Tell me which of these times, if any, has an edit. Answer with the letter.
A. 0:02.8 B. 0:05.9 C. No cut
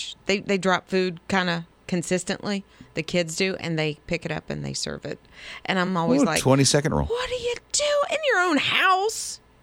C